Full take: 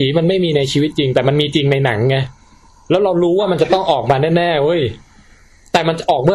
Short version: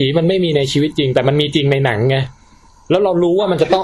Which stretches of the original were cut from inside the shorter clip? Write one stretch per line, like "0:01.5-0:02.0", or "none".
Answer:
none